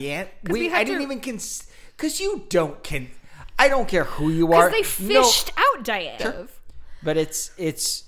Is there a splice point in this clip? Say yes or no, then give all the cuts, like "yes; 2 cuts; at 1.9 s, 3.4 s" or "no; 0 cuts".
yes; 1 cut; at 6.2 s